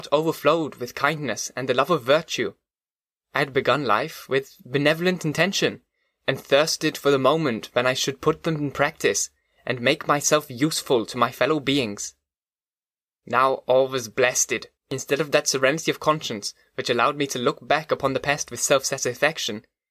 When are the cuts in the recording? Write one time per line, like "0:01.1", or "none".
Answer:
0:14.8